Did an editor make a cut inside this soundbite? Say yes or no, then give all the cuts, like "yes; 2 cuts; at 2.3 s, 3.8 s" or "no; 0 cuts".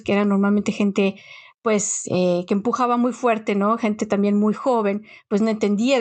no; 0 cuts